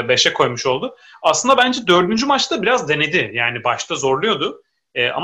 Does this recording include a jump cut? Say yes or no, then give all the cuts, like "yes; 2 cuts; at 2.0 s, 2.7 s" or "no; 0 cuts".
no; 0 cuts